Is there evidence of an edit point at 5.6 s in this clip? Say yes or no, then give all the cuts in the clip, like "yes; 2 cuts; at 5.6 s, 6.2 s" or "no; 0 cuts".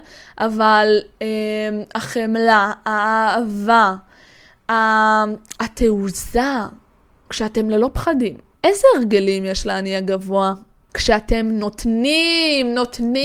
yes; 3 cuts; at 5.6 s, 8.5 s, 10.9 s